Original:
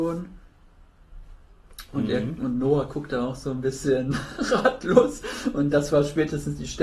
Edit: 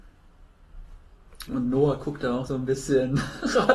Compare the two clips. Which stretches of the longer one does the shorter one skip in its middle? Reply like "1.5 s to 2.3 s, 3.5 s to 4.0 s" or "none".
1.9 s to 2.4 s, 3.4 s to 3.4 s